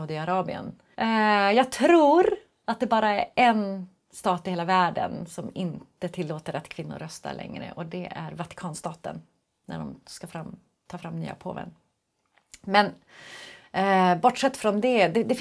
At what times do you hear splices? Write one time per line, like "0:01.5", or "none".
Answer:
0:00.9